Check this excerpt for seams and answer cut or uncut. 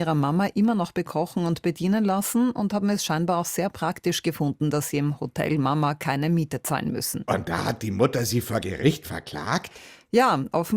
uncut